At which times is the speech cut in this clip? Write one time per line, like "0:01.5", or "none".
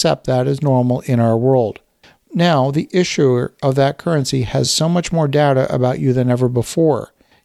none